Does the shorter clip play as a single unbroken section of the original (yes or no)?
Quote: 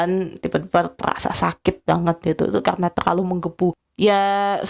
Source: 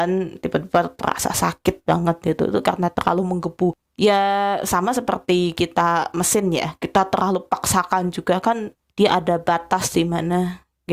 yes